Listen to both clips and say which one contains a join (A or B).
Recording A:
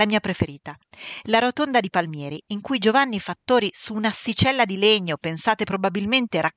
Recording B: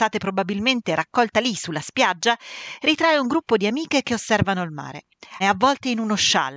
B